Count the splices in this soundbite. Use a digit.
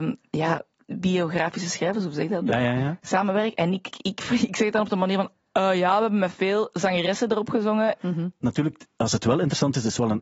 2